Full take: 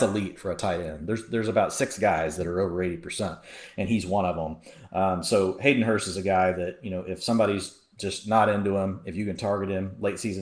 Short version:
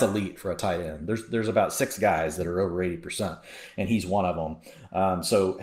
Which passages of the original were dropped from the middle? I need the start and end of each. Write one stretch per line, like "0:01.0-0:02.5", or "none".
none

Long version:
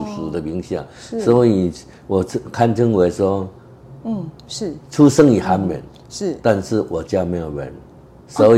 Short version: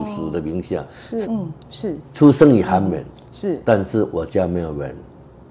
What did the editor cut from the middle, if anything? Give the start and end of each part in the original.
0:01.2-0:04.0

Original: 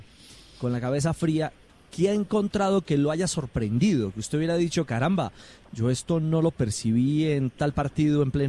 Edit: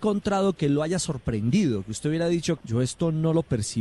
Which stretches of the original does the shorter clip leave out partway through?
0:04.9-0:05.7

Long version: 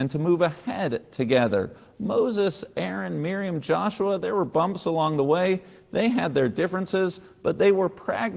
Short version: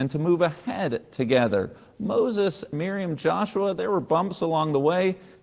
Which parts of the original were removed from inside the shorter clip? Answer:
0:02.7-0:03.2

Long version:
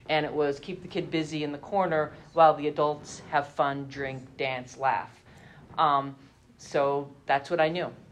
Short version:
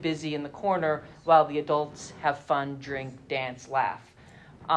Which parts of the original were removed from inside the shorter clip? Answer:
none

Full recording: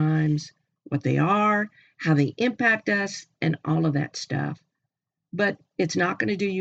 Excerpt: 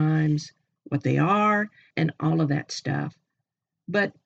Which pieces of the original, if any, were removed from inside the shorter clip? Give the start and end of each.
0:01.9-0:03.3

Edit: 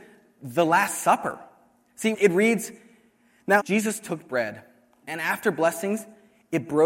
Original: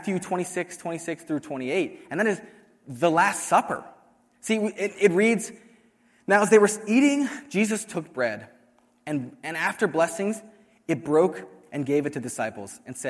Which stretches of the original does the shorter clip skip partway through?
0:04.6-0:04.9
0:06.4-0:07.4
0:08.9-0:09.4

